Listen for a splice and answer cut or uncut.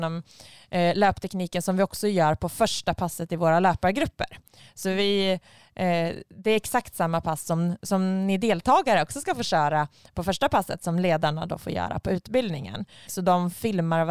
cut